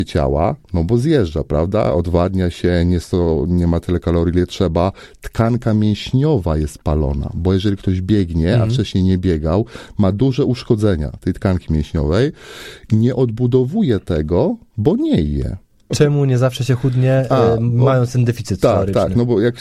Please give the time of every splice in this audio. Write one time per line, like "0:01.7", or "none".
0:15.9